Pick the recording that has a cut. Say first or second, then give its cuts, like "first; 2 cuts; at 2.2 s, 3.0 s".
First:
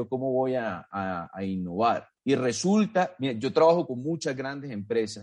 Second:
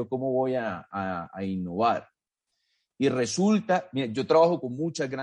first; 1 cut; at 2.2 s